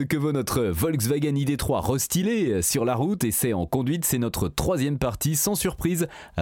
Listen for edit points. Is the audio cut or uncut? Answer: uncut